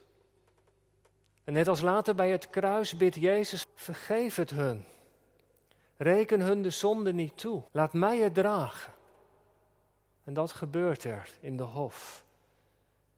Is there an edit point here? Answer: yes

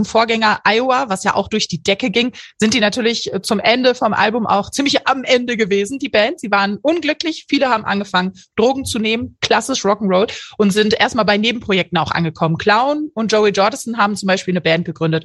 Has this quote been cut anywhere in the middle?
no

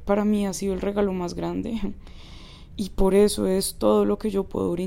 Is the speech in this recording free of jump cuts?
yes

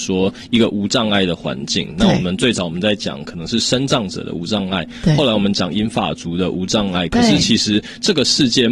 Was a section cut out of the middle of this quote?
no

